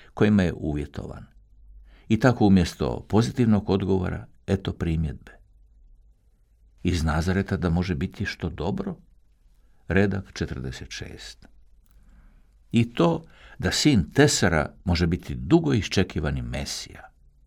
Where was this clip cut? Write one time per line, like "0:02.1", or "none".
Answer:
none